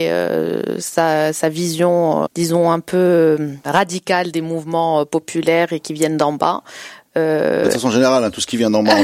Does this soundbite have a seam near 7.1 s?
no; 1 cut; at 2.3 s

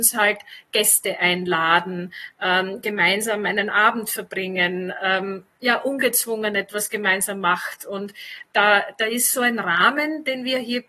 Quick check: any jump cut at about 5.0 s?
no; 0 cuts

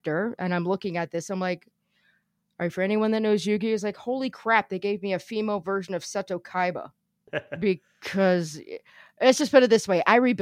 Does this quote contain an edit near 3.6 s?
no; 1 cut; at 7.3 s

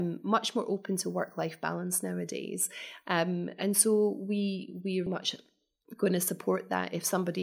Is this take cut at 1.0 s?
no; 2 cuts; at 3.0 s, 5.1 s

